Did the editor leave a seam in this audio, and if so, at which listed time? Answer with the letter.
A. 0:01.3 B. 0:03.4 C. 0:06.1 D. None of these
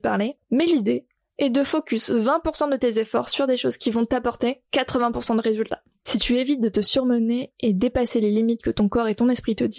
C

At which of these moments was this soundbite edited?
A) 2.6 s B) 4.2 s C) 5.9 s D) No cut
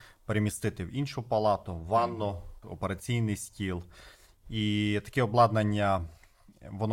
A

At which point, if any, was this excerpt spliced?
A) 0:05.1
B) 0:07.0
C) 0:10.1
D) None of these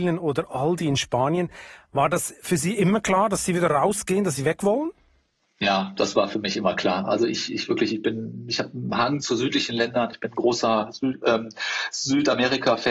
D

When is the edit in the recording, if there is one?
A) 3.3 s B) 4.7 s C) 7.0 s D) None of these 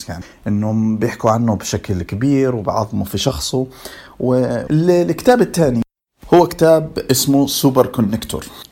B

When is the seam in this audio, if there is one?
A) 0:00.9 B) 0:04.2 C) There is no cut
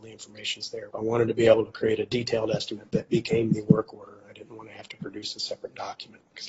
A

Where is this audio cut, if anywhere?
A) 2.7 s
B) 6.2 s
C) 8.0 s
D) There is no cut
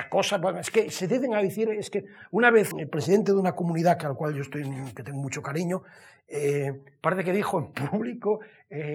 A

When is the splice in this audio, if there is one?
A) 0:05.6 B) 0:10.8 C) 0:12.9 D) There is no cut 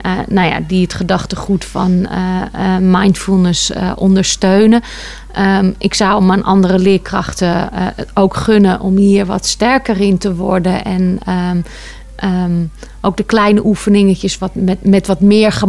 D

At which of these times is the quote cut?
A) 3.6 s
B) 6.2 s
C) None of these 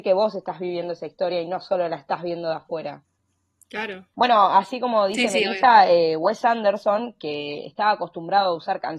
C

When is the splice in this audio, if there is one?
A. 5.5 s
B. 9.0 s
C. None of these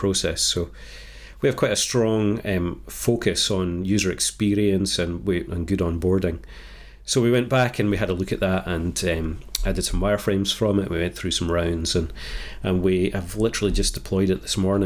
A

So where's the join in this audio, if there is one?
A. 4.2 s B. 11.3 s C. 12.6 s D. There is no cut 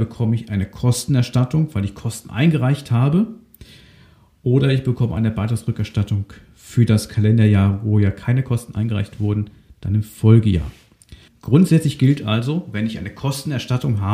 B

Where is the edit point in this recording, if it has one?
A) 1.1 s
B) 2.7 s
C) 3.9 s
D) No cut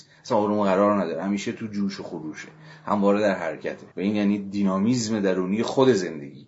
C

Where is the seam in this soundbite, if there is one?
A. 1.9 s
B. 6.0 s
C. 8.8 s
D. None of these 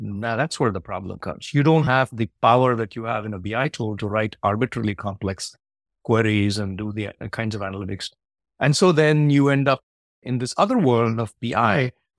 D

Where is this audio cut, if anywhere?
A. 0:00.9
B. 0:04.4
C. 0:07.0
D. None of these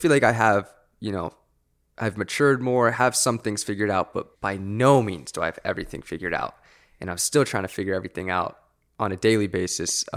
B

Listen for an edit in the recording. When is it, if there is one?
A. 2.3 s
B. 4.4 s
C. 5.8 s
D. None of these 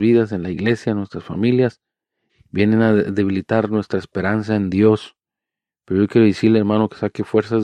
A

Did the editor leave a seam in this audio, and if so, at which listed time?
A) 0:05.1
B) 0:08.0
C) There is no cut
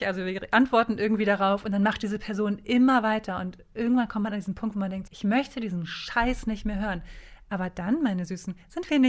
A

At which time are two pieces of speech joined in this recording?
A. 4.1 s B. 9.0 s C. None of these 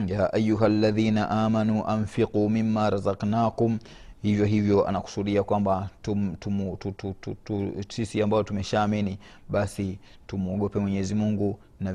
C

